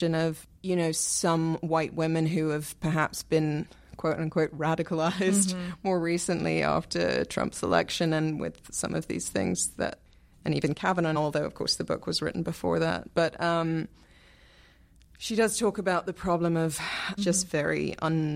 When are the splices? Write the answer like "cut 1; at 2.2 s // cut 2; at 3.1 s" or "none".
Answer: cut 1; at 11.2 s // cut 2; at 17.2 s